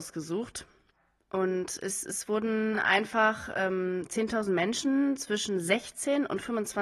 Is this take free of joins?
yes; 0 cuts

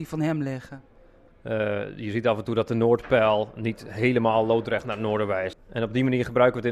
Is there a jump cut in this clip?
yes; 2 cuts; at 1.3 s, 5.5 s

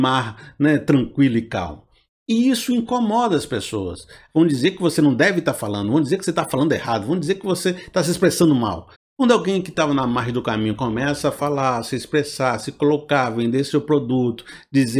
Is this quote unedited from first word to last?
no; 2 cuts; at 4.3 s, 8.9 s

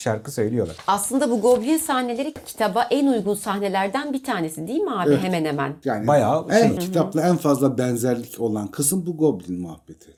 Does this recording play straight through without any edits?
no; 1 cut; at 6.8 s

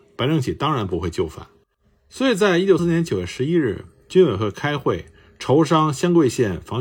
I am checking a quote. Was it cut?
yes; 1 cut; at 2.8 s

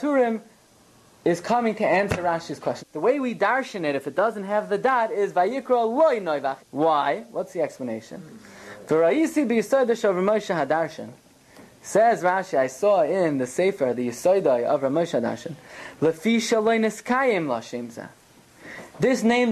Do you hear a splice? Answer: yes; 2 cuts; at 2.8 s, 6.6 s

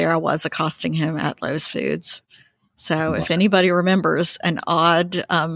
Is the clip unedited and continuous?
yes; 0 cuts

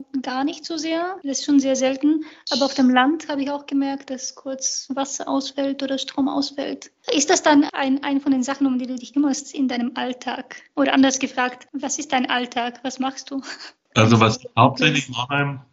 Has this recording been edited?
yes; 1 cut; at 4.1 s

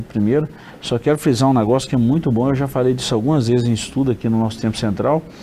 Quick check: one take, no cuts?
yes; 0 cuts

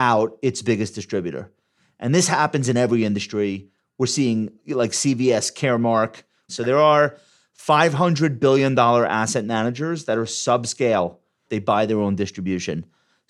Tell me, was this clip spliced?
yes; 2 cuts; at 6.5 s, 11.5 s

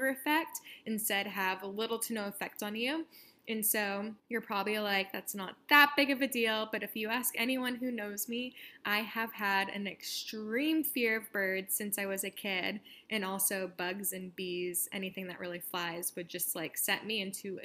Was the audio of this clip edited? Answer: yes; 1 cut; at 4.2 s

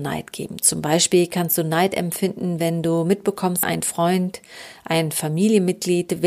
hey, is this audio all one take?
no; 1 cut; at 3.6 s

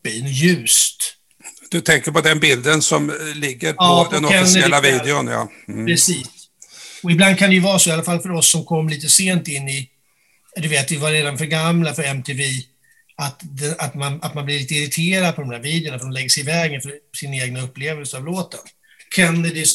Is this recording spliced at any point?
no; 0 cuts

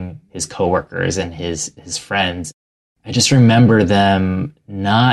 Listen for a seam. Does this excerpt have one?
no; 0 cuts

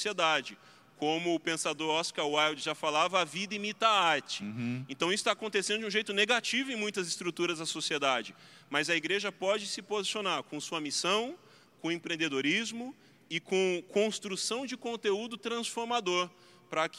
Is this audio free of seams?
yes; 0 cuts

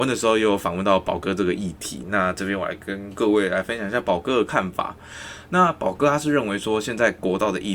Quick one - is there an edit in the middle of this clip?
no; 0 cuts

